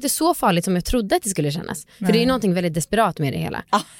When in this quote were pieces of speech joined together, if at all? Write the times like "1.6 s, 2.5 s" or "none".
none